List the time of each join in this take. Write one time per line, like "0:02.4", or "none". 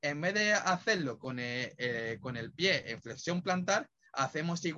none